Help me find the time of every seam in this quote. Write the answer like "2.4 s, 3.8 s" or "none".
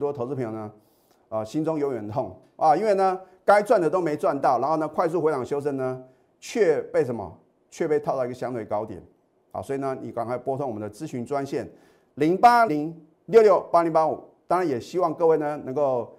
12.7 s